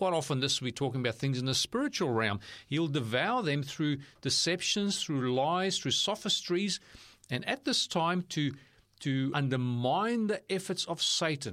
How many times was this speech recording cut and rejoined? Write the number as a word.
two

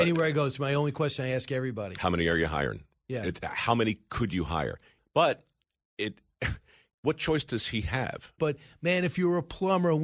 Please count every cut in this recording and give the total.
two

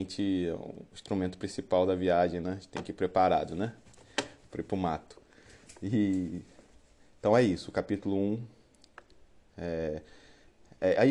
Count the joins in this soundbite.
zero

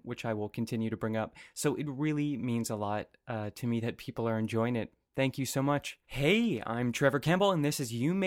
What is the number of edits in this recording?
one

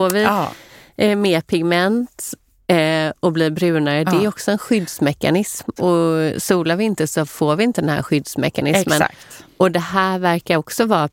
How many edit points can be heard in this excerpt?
one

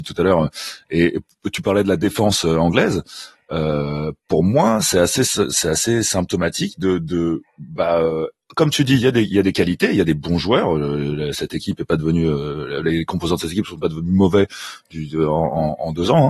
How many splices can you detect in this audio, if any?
zero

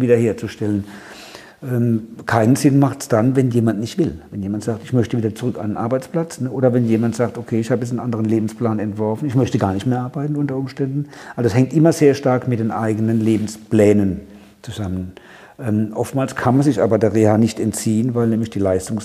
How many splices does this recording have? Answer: zero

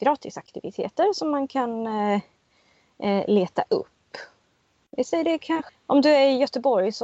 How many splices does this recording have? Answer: one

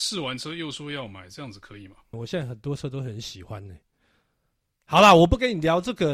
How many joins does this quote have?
one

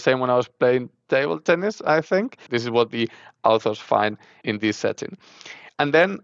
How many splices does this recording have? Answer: one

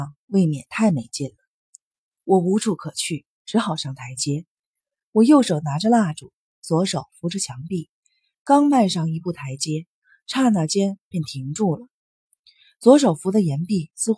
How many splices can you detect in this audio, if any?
zero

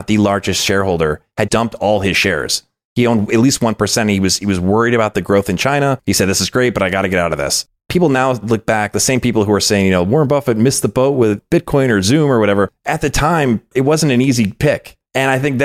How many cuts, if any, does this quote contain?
one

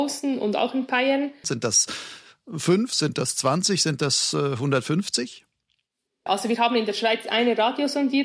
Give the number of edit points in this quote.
two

